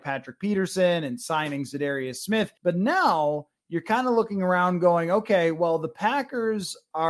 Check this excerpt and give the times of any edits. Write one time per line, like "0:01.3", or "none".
0:02.6